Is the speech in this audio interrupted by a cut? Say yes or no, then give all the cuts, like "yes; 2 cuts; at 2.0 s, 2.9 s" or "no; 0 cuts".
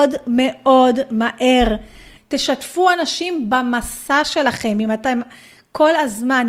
yes; 1 cut; at 2.2 s